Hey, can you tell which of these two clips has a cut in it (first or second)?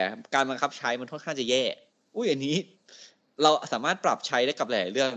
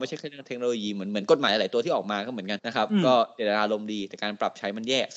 second